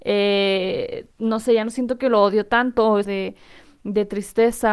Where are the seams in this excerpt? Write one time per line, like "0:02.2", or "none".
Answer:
0:01.1
0:03.0